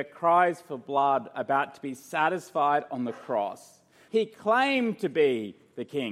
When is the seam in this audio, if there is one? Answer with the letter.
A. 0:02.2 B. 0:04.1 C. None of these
B